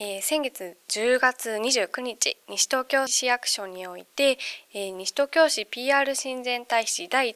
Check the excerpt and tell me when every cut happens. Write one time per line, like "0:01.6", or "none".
0:03.1